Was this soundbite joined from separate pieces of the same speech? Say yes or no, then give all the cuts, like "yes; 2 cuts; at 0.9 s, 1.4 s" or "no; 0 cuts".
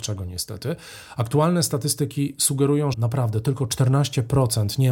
yes; 1 cut; at 2.9 s